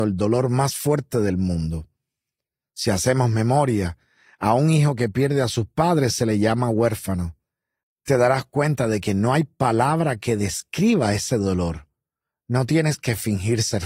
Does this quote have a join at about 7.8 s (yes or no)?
yes